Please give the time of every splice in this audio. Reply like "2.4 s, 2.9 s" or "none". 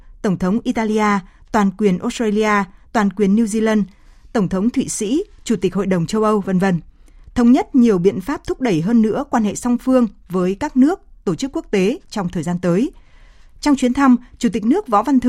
none